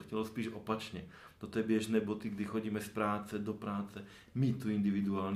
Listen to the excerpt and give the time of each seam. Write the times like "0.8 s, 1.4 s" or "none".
none